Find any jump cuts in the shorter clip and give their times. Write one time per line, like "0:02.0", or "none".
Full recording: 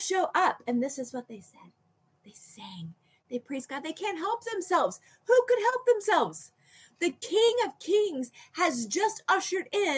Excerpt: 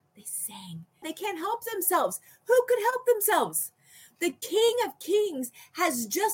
0:01.0